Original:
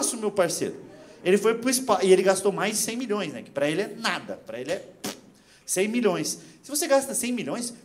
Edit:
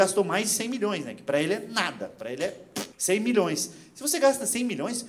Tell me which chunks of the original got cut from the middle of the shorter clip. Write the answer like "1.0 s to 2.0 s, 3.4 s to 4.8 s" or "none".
5.2 s to 5.6 s